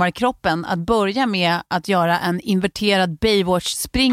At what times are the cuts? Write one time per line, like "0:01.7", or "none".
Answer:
none